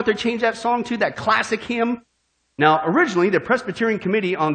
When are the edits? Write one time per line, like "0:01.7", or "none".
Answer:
0:02.5